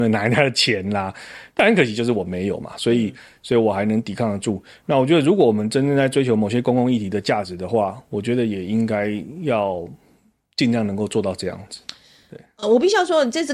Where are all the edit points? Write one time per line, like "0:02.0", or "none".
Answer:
none